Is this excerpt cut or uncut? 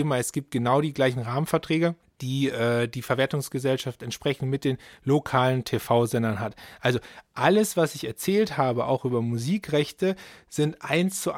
uncut